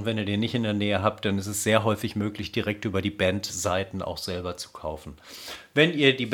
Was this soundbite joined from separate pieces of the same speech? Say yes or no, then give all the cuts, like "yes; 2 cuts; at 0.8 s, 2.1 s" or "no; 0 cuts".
no; 0 cuts